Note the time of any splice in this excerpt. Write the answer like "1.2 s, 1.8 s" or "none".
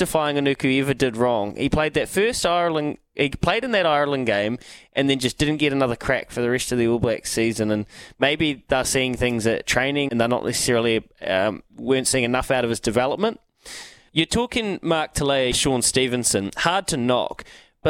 10.1 s, 14.1 s, 15.5 s